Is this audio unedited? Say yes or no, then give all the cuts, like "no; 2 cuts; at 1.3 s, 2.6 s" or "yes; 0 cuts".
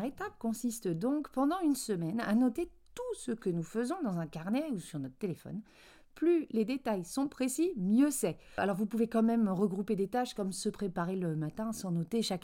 yes; 0 cuts